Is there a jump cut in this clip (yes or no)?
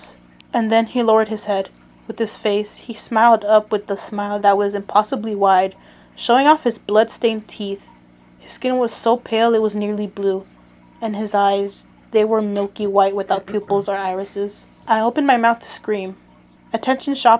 yes